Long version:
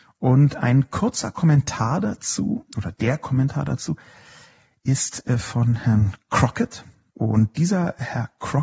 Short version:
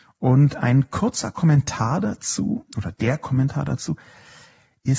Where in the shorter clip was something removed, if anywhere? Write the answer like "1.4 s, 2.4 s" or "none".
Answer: none

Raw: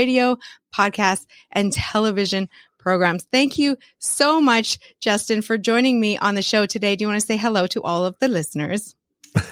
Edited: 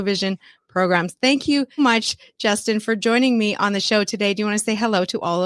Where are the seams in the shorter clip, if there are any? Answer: 1.8 s

